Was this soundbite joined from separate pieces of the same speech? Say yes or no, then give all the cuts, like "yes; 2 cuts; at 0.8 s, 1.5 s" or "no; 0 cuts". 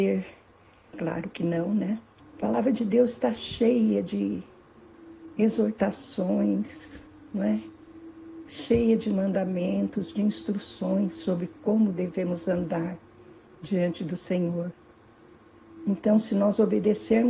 yes; 2 cuts; at 0.9 s, 2.2 s